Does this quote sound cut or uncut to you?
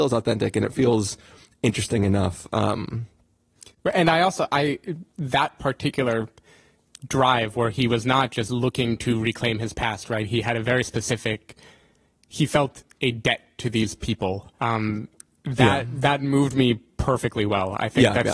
cut